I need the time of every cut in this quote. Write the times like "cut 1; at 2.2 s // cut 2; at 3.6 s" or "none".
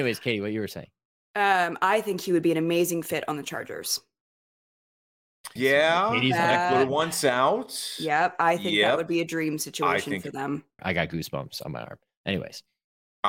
cut 1; at 5.6 s // cut 2; at 10.8 s